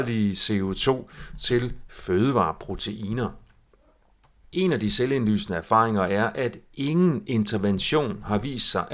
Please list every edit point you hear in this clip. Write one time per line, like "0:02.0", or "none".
0:04.4